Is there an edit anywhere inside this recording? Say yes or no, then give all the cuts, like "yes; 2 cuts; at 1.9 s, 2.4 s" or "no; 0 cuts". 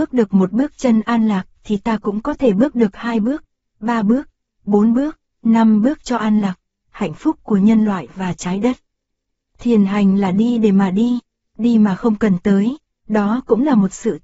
no; 0 cuts